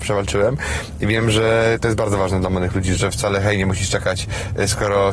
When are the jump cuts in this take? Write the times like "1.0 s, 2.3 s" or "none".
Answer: 3.0 s